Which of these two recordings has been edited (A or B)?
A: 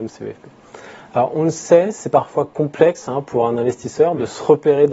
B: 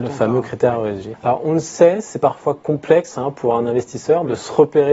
B